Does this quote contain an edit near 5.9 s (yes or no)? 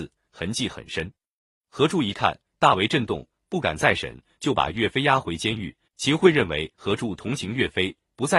yes